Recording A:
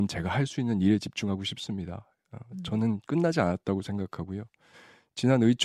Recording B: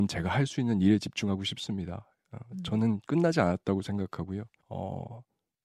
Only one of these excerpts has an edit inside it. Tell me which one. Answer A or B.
B